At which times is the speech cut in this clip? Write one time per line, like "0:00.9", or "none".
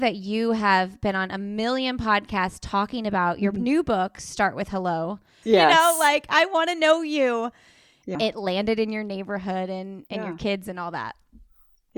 0:05.4
0:08.1

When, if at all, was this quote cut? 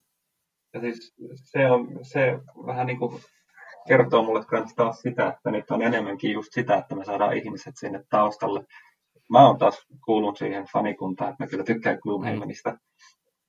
none

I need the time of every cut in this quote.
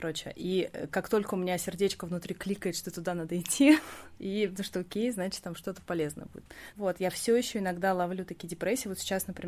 0:04.2
0:06.7

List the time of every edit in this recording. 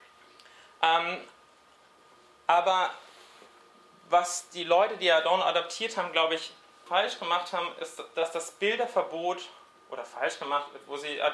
0:06.9

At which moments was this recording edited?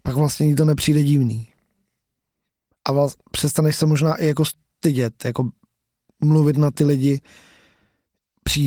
none

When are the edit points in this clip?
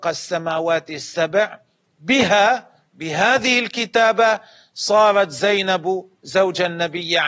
none

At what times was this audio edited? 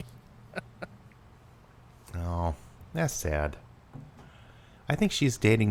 none

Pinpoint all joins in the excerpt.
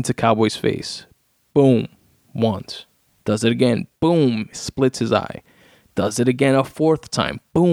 0:03.2
0:04.5

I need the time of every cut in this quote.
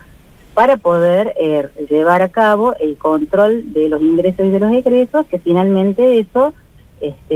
none

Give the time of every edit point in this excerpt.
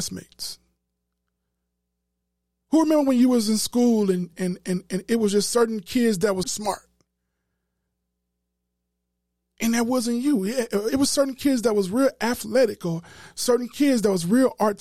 0:04.3
0:06.4

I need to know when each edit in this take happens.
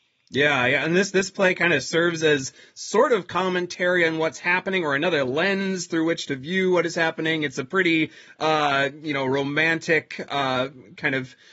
none

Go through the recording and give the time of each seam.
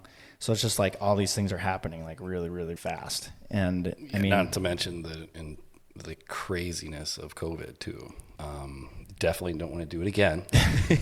0:02.8
0:08.4

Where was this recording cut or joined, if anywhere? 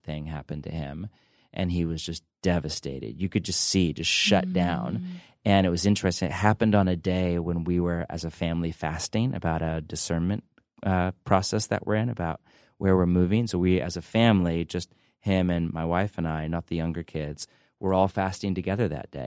none

